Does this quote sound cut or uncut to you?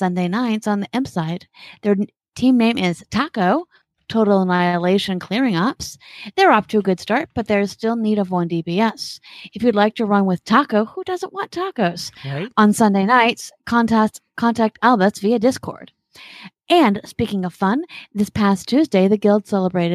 uncut